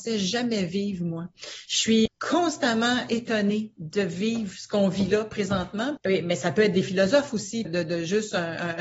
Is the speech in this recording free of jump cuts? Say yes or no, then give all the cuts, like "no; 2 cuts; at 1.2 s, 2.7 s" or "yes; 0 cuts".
no; 3 cuts; at 2.1 s, 6.0 s, 7.7 s